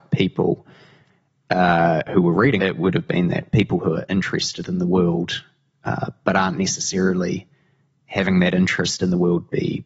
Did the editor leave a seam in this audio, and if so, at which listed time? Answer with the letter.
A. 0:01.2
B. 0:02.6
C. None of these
B